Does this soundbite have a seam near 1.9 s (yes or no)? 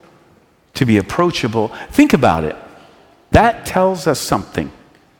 no